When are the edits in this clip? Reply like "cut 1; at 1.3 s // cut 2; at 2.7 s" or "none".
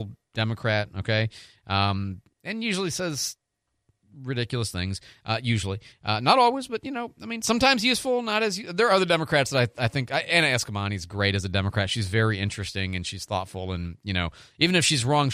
none